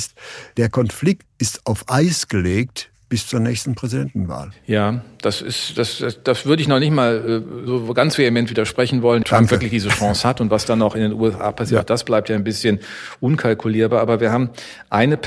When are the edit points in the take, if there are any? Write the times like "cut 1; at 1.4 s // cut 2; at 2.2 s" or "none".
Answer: cut 1; at 1.2 s // cut 2; at 9.2 s